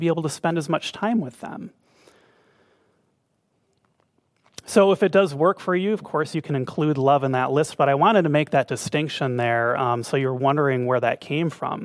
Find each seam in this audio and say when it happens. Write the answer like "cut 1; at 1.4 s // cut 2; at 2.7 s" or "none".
none